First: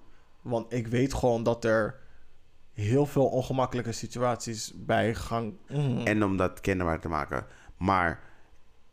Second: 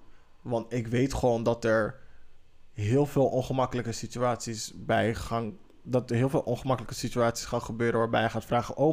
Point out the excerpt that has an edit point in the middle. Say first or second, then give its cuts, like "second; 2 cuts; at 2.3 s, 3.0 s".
first; 1 cut; at 5.7 s